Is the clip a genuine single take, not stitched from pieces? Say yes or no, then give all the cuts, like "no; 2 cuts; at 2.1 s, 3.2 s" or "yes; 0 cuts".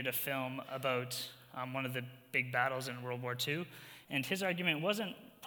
no; 1 cut; at 4.0 s